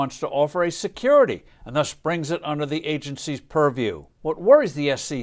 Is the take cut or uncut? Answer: cut